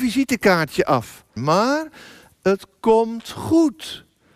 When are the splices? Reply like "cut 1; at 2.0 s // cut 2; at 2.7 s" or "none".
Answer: cut 1; at 1.4 s